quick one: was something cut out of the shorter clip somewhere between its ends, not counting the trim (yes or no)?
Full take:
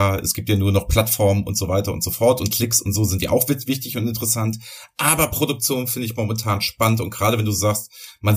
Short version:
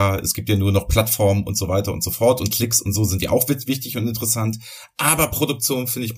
no